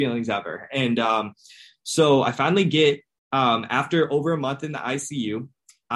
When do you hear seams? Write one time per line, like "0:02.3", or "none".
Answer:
none